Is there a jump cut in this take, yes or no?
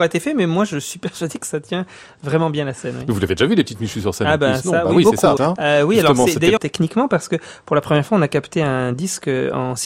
yes